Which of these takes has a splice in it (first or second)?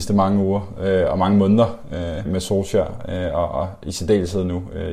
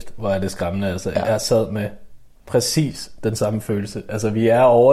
first